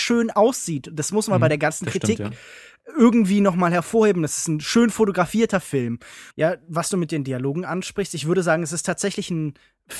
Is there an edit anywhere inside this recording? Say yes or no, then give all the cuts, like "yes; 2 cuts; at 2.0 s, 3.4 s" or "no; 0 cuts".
yes; 1 cut; at 6.3 s